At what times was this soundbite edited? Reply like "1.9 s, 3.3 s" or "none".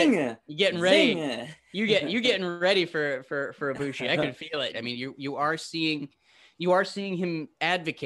4.7 s